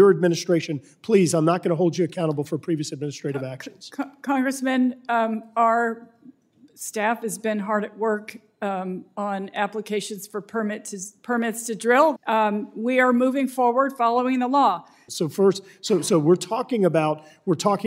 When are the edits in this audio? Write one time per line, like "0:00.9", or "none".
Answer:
0:12.2
0:15.1

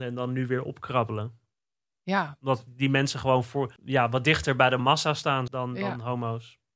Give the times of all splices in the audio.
0:03.8
0:05.5

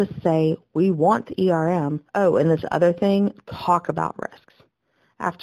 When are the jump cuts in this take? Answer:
0:02.1

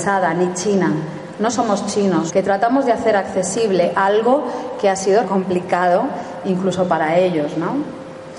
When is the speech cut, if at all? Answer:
0:02.3
0:05.2

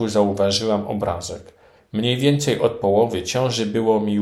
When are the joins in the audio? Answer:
0:01.8

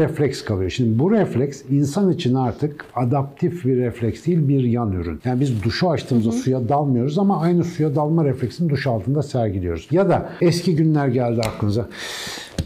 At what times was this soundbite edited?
none

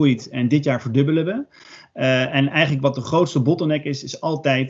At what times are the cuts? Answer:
none

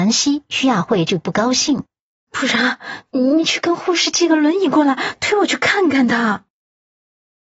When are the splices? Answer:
0:02.3

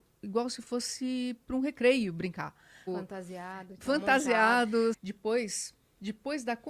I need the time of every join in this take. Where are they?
0:02.9
0:04.9

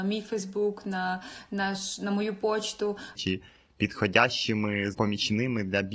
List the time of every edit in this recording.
0:03.1
0:04.9

